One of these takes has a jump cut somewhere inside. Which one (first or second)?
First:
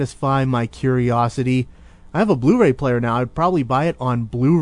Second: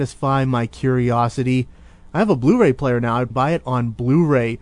second